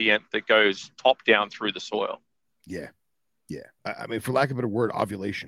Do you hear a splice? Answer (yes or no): yes